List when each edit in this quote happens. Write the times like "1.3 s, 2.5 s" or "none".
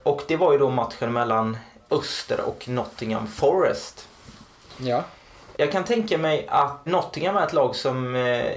6.9 s